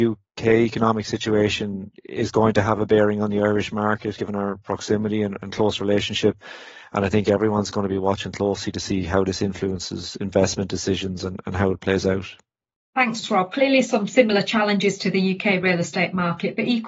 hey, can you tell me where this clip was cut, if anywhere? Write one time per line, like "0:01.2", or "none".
none